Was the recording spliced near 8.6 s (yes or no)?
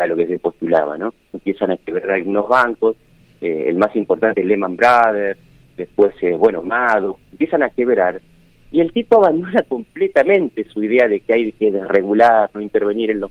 no